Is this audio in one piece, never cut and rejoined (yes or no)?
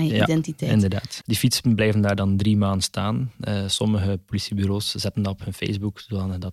no